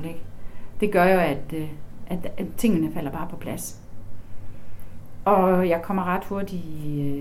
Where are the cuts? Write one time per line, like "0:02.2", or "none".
none